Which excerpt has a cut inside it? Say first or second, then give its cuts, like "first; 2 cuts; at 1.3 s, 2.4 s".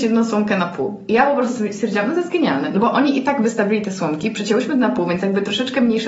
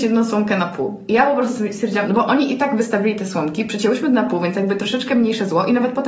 second; 1 cut; at 2.0 s